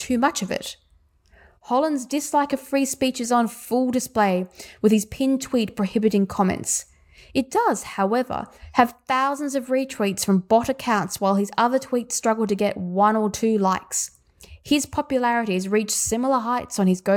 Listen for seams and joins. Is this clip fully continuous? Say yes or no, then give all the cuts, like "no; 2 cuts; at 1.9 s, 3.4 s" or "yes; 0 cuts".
yes; 0 cuts